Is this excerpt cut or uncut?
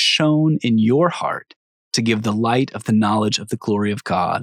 uncut